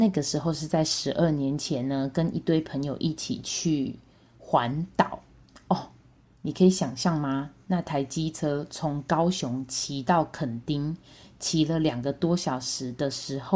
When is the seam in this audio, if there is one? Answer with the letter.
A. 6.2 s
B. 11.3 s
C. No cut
C